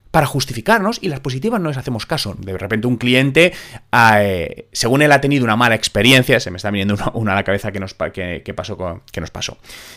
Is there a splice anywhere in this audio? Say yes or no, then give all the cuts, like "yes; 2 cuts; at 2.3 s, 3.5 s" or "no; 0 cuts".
yes; 1 cut; at 2.4 s